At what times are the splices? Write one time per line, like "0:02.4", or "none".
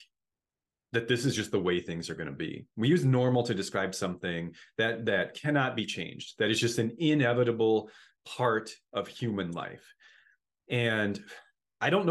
none

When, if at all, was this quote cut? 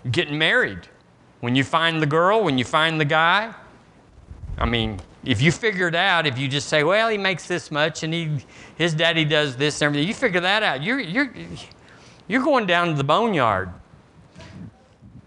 none

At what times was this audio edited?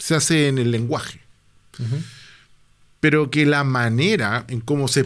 none

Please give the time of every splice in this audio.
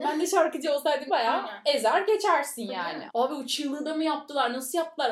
0:01.1
0:03.1

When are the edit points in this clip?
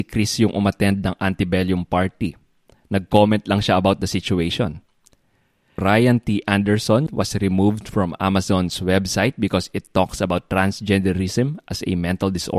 0:05.8
0:07.1

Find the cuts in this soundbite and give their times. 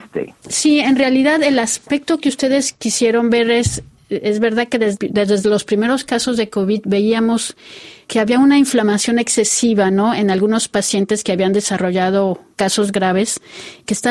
none

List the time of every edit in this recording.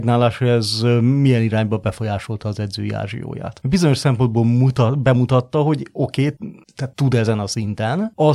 none

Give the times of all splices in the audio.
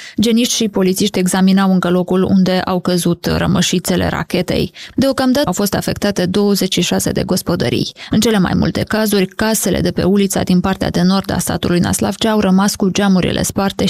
0:05.5

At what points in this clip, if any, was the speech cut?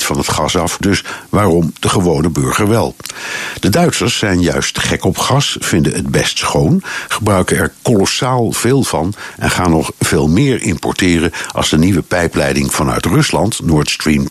none

